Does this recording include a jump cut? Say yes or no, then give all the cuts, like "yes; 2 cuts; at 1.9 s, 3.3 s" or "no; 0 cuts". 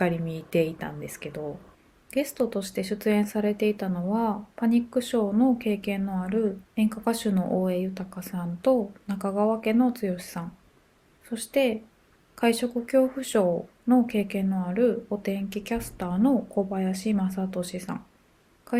yes; 1 cut; at 6.7 s